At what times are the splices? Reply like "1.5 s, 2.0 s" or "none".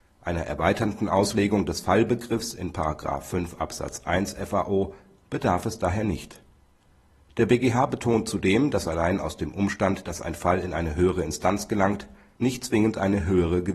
none